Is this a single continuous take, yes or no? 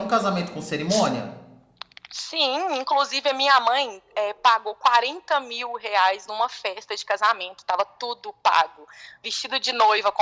yes